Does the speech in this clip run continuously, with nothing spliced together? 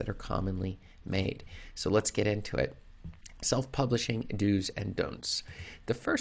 yes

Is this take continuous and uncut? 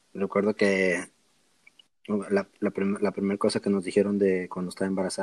yes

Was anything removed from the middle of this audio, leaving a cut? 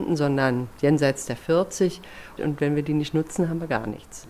yes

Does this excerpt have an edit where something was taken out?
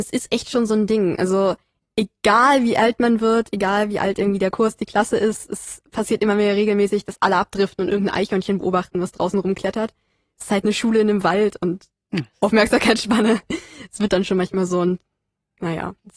no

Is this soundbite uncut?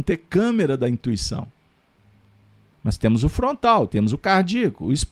no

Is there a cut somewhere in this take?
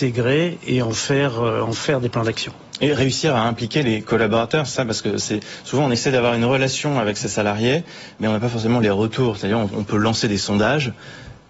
yes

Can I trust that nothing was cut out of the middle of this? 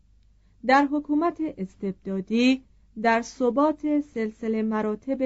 yes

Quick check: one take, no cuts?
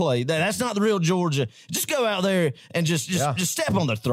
yes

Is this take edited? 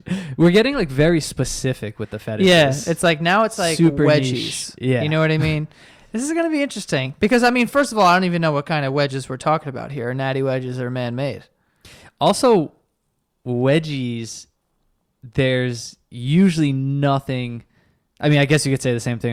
no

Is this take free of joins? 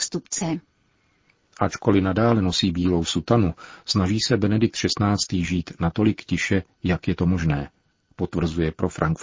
yes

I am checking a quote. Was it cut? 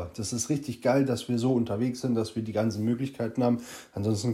no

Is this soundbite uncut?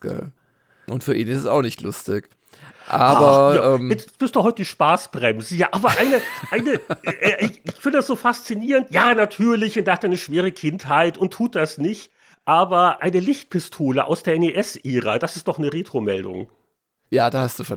yes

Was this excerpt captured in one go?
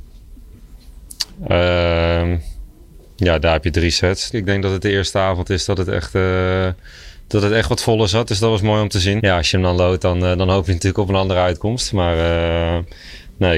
no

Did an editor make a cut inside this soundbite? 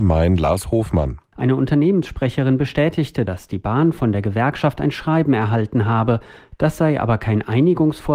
no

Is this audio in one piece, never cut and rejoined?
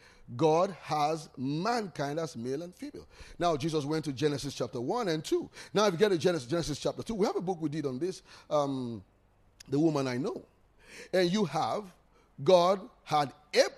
yes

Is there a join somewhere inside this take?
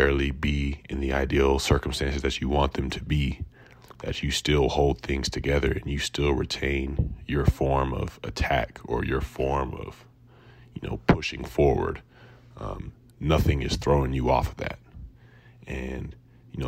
no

